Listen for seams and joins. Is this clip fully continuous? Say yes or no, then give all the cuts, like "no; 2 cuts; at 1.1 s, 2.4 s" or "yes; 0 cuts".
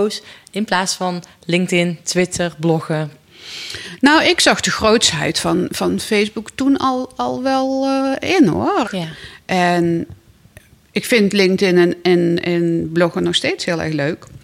no; 1 cut; at 8.8 s